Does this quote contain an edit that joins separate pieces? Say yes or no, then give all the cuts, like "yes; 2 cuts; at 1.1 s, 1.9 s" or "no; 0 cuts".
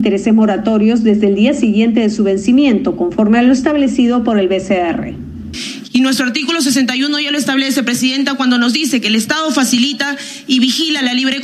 yes; 1 cut; at 5.8 s